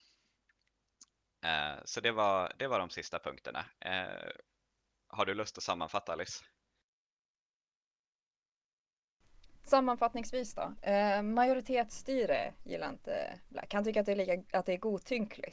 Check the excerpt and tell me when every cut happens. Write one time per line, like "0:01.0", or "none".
0:09.6